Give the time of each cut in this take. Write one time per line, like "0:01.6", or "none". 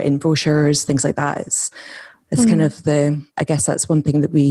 0:03.3